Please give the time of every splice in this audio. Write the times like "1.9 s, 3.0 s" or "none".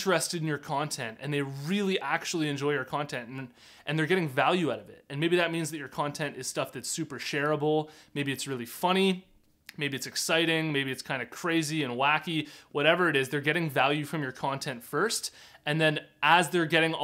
none